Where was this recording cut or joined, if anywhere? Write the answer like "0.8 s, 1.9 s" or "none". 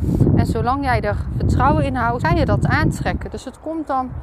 2.2 s